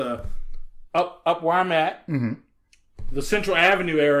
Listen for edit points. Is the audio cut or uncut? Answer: uncut